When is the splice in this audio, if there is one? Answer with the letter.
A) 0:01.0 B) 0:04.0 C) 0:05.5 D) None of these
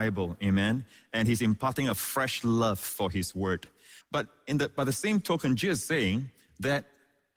B